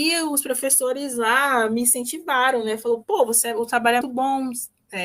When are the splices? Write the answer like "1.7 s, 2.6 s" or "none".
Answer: 4.0 s